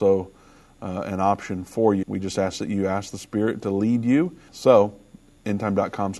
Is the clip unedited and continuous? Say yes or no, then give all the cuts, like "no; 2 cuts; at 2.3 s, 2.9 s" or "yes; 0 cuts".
no; 2 cuts; at 2.0 s, 4.5 s